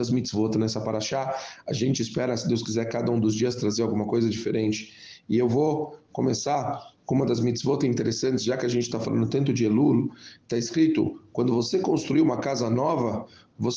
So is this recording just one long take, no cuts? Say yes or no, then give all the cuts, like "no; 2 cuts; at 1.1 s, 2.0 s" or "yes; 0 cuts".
yes; 0 cuts